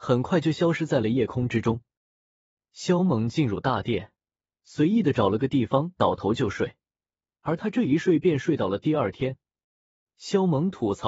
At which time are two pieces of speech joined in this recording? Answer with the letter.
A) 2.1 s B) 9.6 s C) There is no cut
B